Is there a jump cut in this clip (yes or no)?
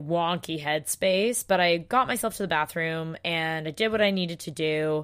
no